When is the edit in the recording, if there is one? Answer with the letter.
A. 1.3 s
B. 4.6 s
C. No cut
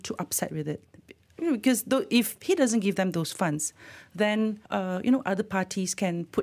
B